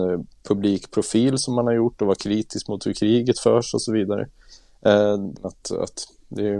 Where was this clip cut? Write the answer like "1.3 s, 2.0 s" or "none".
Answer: 5.4 s